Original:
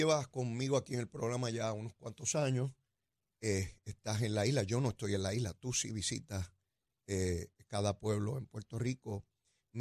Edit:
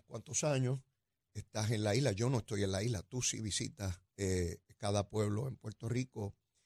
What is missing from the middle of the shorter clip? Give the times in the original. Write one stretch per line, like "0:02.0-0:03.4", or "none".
0:03.2-0:03.8
0:06.6-0:07.0